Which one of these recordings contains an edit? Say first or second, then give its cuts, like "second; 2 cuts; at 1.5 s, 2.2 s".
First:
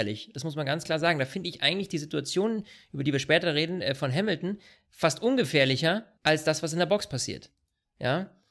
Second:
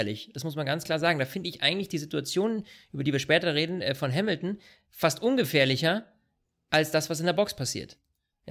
first; 1 cut; at 6.2 s